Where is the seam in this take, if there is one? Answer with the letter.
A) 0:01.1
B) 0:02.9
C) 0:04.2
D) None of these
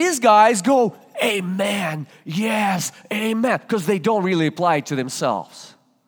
D